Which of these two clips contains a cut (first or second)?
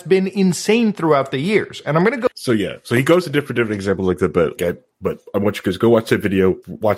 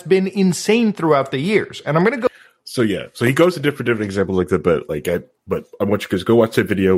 first